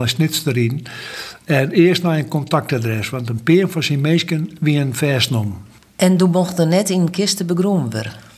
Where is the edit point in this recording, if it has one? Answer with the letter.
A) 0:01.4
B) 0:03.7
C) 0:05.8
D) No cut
C